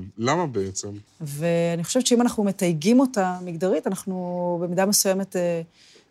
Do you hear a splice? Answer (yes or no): yes